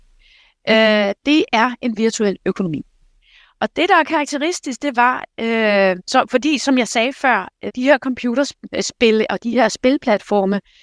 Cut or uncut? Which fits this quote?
cut